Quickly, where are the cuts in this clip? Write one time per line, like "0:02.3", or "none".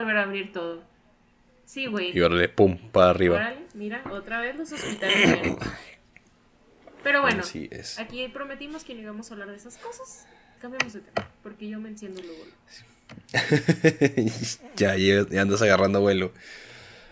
0:10.6